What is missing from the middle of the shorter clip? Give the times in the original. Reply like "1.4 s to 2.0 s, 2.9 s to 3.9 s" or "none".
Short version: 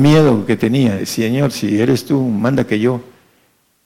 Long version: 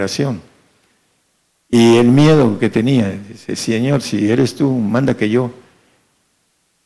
3.1 s to 3.5 s